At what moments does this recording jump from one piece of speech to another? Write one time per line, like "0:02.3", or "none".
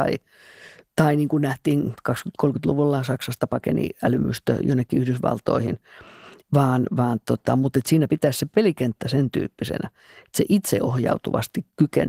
0:06.4
0:08.1